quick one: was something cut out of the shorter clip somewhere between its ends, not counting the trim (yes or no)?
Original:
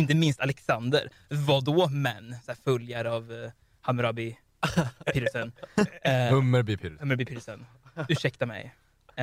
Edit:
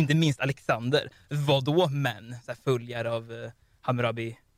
no